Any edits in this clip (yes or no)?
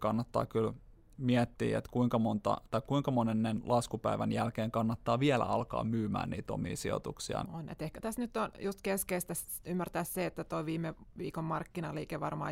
yes